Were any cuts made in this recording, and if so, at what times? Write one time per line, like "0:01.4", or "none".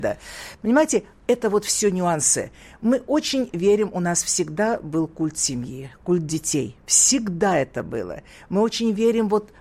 none